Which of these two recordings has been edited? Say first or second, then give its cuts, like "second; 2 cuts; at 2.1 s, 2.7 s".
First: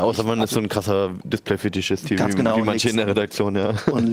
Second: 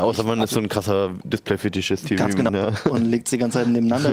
second; 1 cut; at 2.5 s